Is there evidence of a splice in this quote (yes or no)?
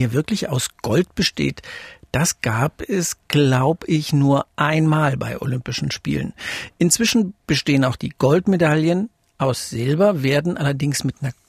no